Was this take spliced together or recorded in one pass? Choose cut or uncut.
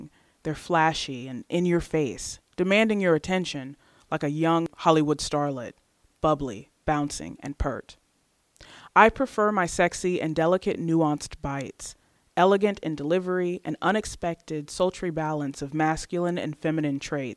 uncut